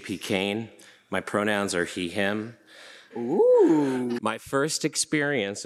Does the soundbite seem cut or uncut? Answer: cut